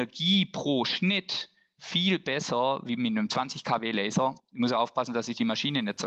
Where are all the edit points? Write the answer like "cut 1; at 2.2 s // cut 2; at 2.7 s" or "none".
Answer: cut 1; at 4.4 s

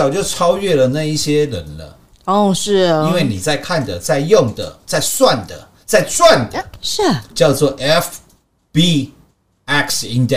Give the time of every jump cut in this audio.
none

